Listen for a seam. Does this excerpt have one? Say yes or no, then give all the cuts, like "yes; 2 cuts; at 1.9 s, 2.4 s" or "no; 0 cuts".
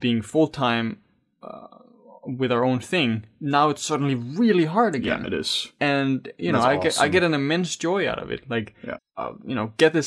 yes; 1 cut; at 9.0 s